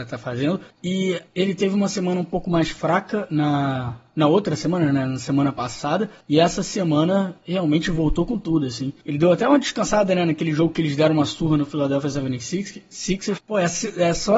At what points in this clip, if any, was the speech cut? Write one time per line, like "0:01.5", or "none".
0:13.4